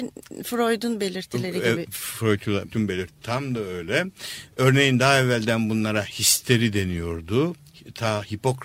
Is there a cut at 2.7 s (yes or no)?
yes